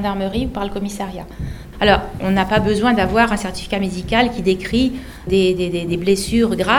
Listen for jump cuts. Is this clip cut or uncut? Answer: cut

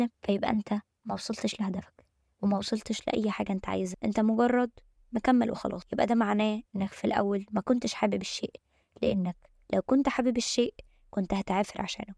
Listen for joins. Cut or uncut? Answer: uncut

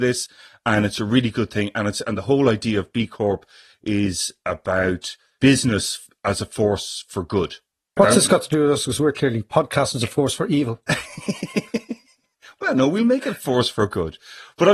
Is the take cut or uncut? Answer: cut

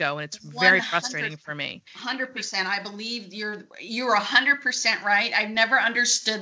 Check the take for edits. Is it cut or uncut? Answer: cut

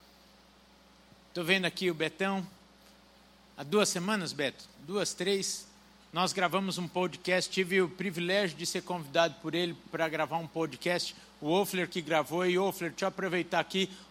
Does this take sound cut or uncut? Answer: uncut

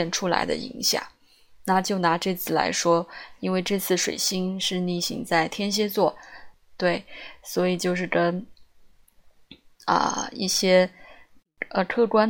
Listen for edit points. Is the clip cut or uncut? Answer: cut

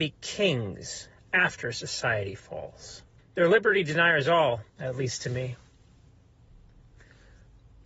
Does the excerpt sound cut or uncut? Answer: cut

